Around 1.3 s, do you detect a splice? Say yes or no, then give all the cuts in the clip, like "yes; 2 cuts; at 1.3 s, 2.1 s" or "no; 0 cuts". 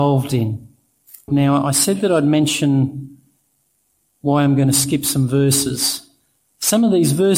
yes; 1 cut; at 1.3 s